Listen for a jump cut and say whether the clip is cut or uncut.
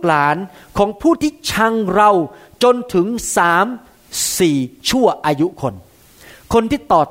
uncut